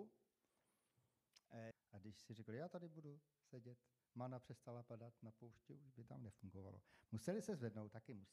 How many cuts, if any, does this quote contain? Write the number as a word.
one